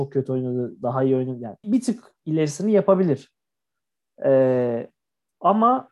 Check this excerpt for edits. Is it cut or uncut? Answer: cut